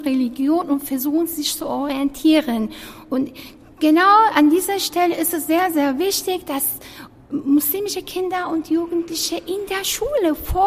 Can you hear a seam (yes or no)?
no